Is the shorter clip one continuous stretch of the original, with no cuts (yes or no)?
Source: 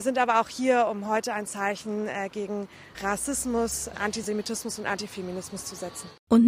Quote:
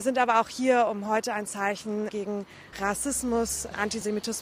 no